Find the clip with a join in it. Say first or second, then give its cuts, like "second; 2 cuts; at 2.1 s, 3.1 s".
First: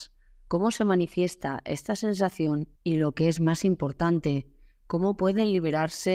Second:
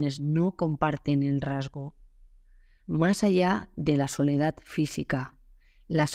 first; 1 cut; at 2.8 s